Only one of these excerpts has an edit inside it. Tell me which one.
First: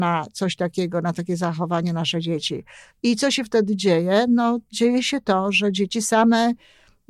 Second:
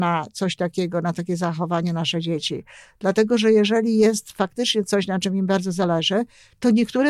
first; 1 cut; at 2.9 s

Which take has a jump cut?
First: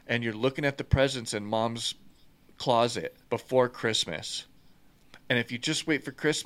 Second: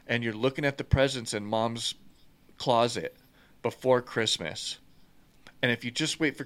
first; 1 cut; at 3.2 s

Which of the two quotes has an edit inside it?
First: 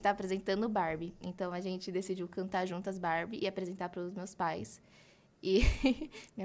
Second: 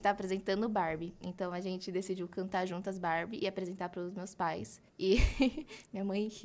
second; 1 cut; at 4.9 s

